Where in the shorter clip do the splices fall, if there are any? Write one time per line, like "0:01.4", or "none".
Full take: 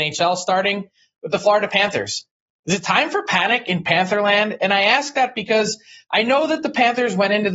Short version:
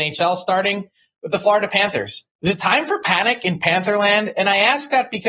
0:02.3